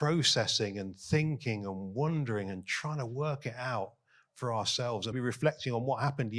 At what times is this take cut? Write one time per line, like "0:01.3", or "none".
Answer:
0:05.1